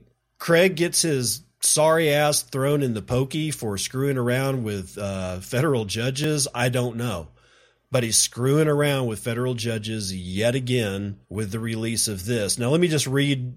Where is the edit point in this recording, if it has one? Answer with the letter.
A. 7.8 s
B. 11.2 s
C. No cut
B